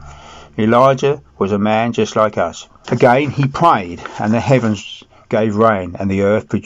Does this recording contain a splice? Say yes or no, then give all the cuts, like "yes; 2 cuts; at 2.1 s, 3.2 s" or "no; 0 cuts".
yes; 1 cut; at 2.8 s